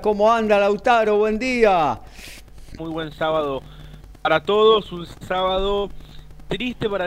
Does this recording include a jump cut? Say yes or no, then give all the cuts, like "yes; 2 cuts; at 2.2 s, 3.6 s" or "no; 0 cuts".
yes; 1 cut; at 2.8 s